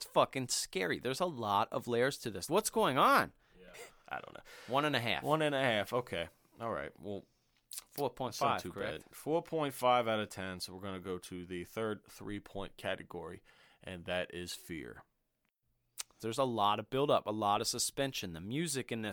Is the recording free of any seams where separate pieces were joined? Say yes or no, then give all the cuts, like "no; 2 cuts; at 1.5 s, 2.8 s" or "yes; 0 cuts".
no; 3 cuts; at 2.5 s, 3.7 s, 16.2 s